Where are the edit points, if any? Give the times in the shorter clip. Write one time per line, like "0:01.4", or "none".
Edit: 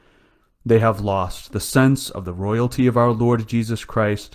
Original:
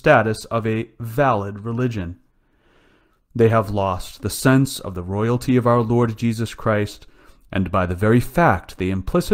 none